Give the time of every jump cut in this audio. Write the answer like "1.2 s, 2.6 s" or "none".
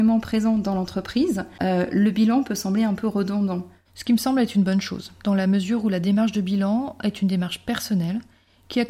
3.8 s